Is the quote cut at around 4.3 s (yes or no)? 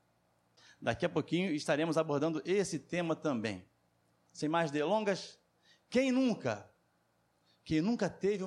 yes